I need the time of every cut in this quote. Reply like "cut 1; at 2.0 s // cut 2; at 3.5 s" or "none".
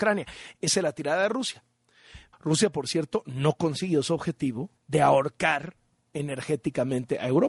cut 1; at 2.3 s // cut 2; at 4.8 s